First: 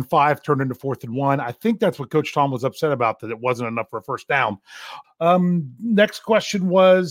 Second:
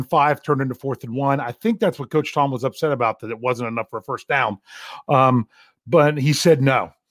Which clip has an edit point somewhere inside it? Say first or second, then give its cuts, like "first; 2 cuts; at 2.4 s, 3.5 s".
first; 1 cut; at 5.0 s